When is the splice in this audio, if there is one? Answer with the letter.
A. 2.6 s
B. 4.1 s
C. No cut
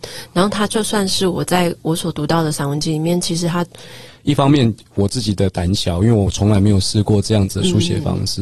B